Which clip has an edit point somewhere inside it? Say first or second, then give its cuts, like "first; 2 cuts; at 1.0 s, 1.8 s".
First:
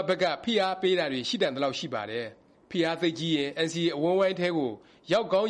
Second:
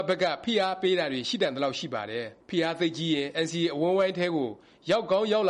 second; 1 cut; at 2.4 s